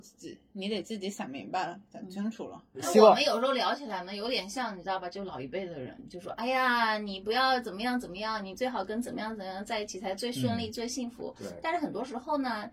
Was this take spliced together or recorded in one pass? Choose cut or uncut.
uncut